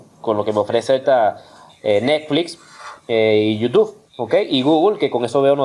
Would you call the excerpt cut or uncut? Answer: cut